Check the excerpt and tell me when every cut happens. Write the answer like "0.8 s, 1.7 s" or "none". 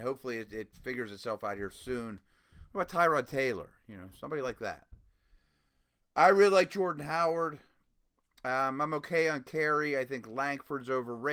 none